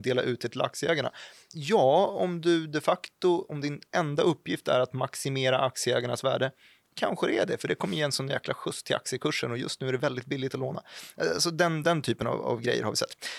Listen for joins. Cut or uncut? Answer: uncut